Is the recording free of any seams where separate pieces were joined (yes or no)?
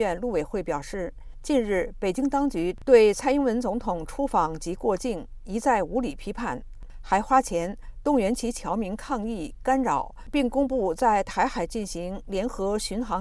yes